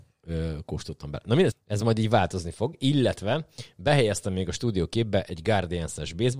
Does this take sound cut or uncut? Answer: cut